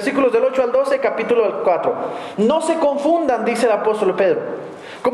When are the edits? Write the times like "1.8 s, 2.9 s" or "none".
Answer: none